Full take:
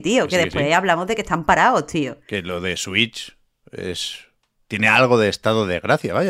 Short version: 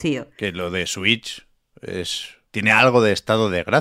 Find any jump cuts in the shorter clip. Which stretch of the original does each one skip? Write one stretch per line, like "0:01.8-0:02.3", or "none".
0:04.4-0:04.6